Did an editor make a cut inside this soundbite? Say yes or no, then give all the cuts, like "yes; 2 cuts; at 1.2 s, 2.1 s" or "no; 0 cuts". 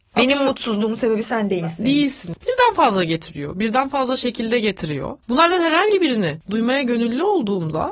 yes; 1 cut; at 2.4 s